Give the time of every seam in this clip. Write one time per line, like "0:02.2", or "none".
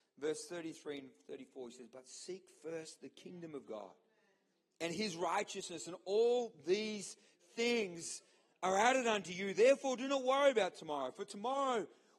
none